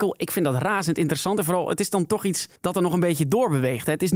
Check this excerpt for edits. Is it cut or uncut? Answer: cut